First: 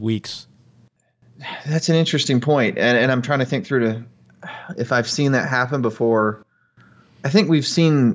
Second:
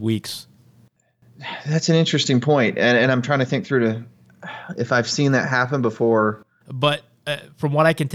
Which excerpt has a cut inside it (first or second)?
second